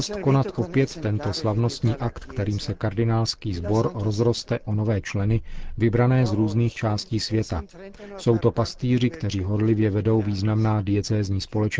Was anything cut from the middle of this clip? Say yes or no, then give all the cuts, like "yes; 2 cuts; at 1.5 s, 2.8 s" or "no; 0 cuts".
no; 0 cuts